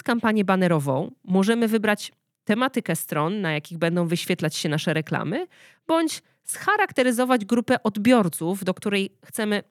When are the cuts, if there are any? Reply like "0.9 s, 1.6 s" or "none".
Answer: none